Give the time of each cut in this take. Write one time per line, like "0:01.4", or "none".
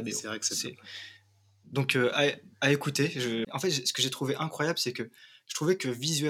0:03.4

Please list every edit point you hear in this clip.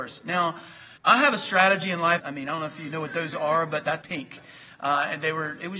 0:01.0
0:02.2
0:04.0

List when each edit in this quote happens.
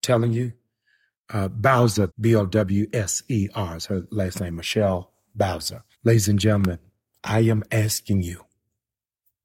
0:02.1
0:05.9

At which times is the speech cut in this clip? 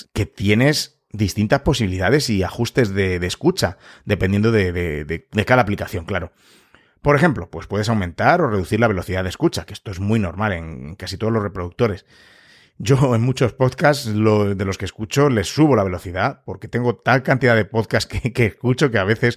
none

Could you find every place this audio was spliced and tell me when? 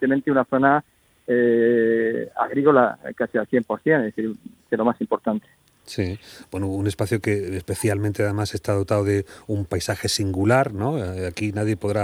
0:04.7

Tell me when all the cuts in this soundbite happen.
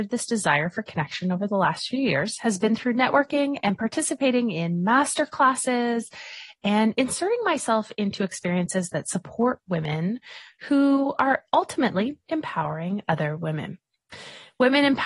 0:12.2

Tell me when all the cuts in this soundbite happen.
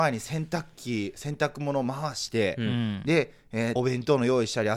0:03.8

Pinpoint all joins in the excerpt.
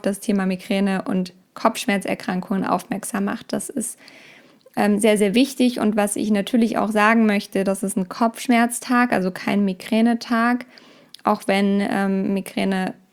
none

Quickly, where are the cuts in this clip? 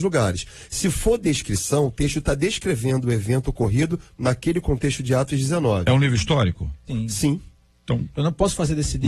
0:06.9

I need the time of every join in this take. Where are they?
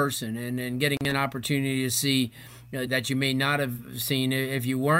0:02.9

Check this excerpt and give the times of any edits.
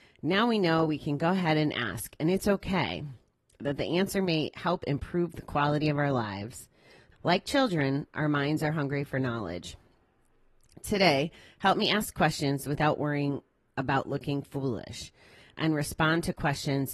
0:07.1

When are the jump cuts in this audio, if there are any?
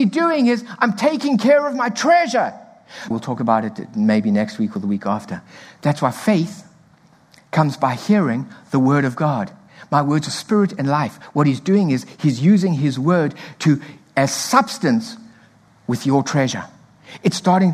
0:03.1

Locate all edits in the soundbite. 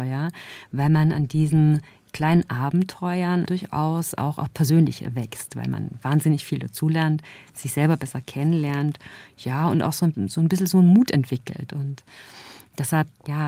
0:11.7

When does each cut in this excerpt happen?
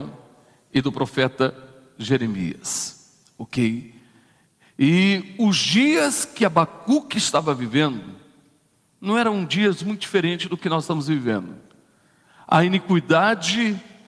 none

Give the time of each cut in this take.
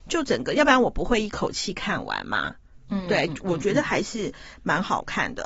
0:03.3

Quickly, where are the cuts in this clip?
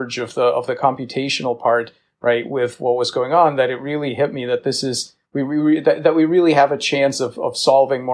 none

